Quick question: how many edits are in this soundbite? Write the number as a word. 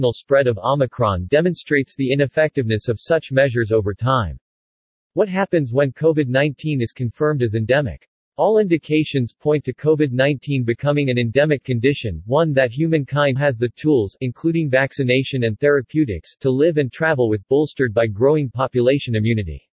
one